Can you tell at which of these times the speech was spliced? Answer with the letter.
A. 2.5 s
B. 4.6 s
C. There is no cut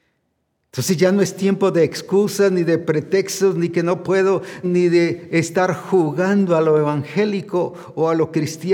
B